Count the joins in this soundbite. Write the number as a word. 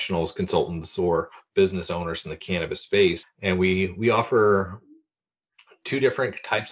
one